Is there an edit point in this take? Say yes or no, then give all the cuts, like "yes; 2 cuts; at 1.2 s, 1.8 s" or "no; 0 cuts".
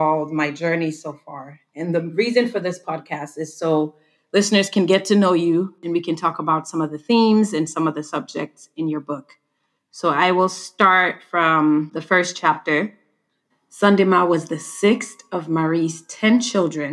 yes; 1 cut; at 13.5 s